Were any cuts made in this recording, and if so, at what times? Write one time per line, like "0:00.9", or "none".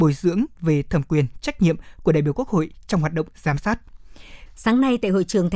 0:04.5